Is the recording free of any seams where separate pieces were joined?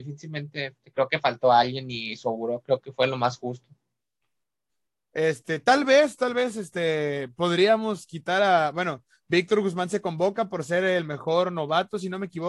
yes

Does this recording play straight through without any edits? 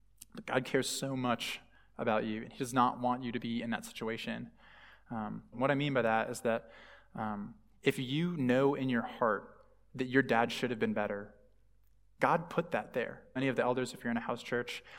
no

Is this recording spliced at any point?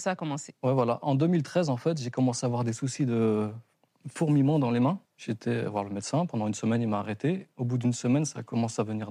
yes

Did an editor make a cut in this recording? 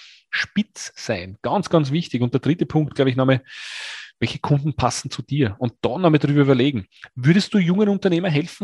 no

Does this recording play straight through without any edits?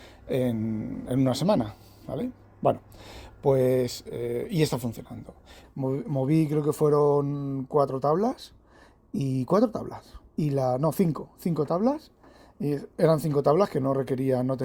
no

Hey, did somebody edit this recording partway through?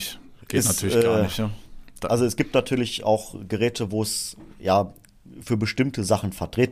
no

